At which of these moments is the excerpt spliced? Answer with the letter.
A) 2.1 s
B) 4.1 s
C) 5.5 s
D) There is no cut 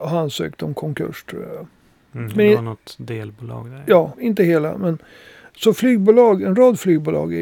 B